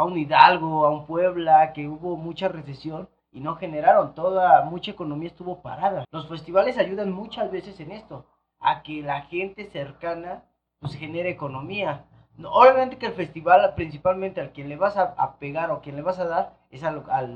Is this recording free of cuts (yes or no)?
no